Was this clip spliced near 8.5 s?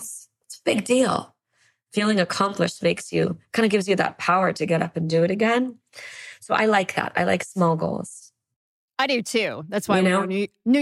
no; 0 cuts

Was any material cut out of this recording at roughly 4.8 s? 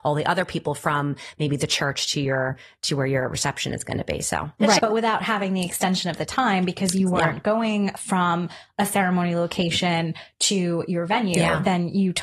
yes; 1 cut; at 4.8 s

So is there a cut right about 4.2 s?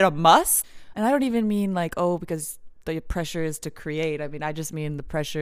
no; 1 cut; at 0.9 s

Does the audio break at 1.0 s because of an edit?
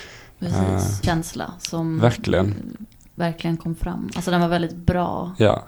yes; 1 cut; at 1.0 s

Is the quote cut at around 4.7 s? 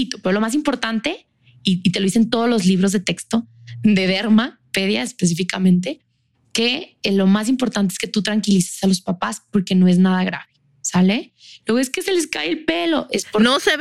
no; 0 cuts

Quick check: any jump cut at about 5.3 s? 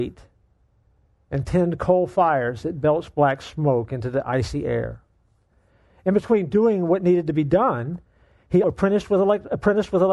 no; 1 cut; at 8.6 s

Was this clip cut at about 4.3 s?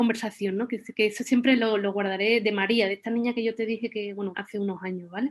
yes; 1 cut; at 4.3 s

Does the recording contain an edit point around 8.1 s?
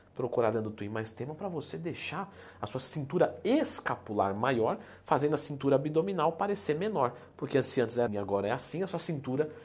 yes; 1 cut; at 8.1 s

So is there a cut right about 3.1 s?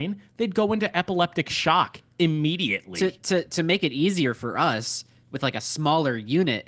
no; 0 cuts

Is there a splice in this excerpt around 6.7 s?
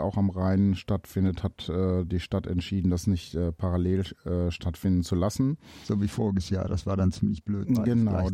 no; 0 cuts

